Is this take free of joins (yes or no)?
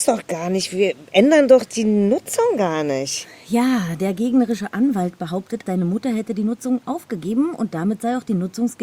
no